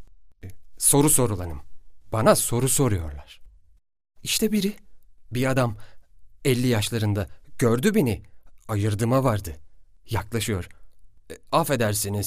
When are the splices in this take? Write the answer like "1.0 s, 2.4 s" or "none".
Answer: none